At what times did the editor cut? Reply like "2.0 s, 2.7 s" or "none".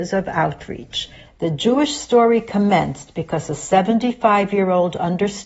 1.3 s